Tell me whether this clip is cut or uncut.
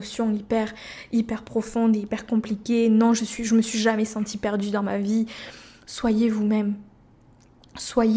uncut